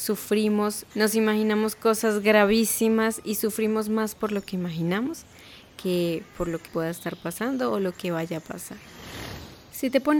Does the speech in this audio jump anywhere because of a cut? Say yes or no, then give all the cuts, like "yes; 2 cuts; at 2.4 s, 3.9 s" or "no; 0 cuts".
yes; 2 cuts; at 0.9 s, 6.7 s